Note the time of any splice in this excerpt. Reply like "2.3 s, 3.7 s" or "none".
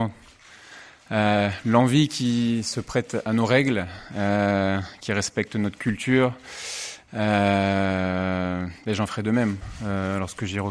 none